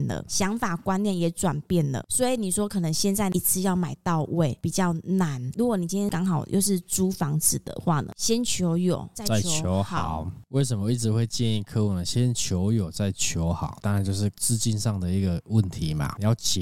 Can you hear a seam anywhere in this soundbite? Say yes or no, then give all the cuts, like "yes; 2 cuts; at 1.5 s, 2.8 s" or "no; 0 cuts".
yes; 2 cuts; at 2.0 s, 8.1 s